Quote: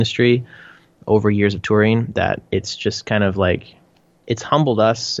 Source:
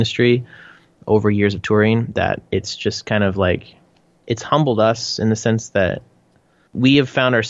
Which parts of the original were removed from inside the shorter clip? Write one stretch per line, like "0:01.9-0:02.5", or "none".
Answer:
none